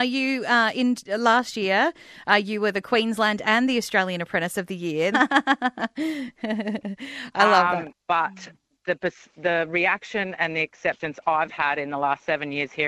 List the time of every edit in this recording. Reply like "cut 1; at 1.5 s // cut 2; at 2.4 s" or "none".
cut 1; at 5.1 s // cut 2; at 7.9 s